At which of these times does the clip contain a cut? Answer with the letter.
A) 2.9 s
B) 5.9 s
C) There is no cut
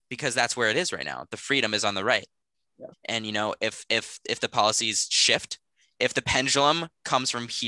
A